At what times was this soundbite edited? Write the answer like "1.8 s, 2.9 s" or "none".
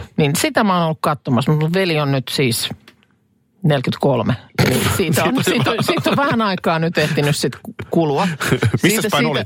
none